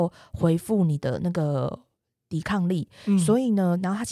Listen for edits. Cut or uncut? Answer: uncut